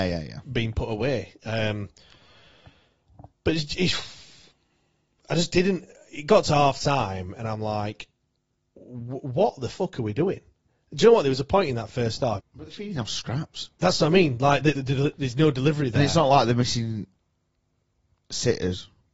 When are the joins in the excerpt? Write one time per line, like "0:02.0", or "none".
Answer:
0:12.4
0:14.7